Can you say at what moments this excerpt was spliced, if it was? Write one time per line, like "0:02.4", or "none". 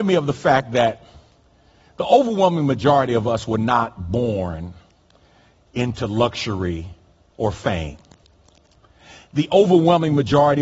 0:07.3